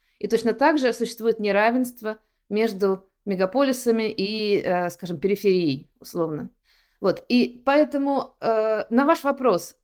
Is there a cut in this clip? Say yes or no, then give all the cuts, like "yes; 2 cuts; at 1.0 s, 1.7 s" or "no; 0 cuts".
no; 0 cuts